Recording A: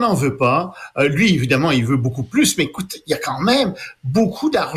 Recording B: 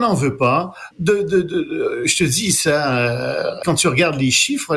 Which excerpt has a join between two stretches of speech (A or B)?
B